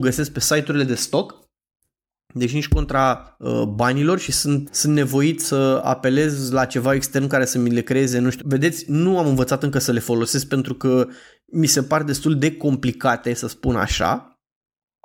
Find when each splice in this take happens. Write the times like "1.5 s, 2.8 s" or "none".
4.7 s, 8.4 s